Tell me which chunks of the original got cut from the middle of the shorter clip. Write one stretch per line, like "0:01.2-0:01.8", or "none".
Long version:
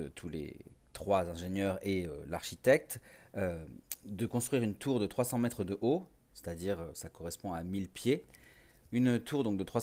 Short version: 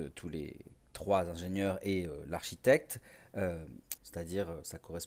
0:04.0-0:06.3